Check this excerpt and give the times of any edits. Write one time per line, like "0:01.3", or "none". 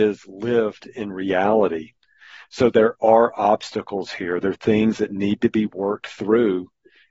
none